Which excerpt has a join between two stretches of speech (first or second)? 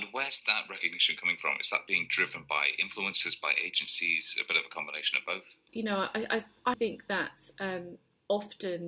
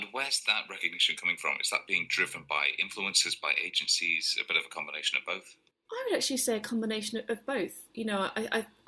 first